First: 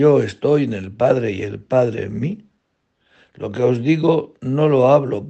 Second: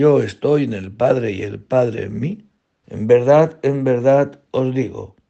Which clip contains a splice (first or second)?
second